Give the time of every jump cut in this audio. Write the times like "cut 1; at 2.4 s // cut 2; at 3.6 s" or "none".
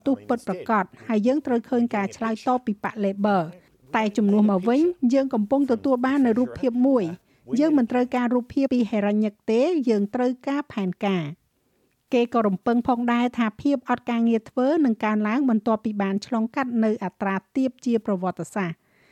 cut 1; at 8.7 s